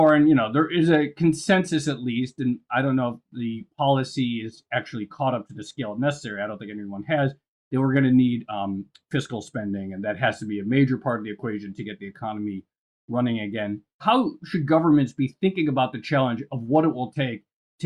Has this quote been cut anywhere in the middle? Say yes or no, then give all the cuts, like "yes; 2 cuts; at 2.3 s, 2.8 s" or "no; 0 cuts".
no; 0 cuts